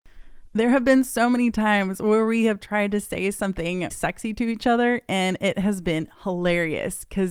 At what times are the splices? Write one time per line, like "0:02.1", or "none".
0:03.9